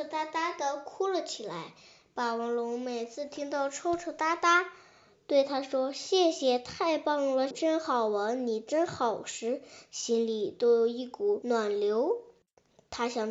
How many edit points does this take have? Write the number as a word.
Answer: one